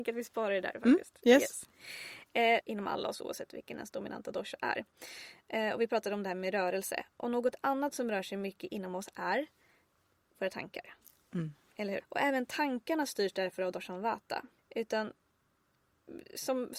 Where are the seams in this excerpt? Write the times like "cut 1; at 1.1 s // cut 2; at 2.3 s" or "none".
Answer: cut 1; at 2.6 s // cut 2; at 12.0 s // cut 3; at 14.6 s